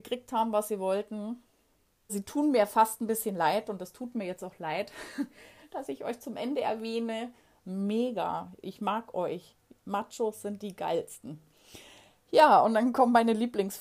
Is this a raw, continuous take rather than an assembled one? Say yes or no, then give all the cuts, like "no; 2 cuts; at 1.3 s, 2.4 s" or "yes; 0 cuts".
no; 2 cuts; at 2.1 s, 7.6 s